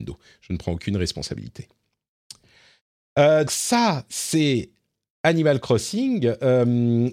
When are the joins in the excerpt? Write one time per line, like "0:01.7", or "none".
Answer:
0:03.5